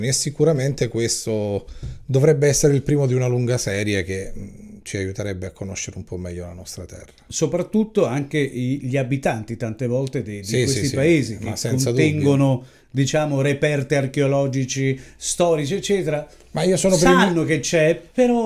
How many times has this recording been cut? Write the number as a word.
zero